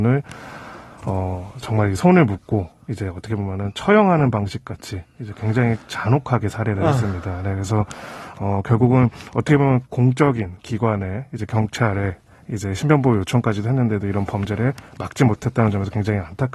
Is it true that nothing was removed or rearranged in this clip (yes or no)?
no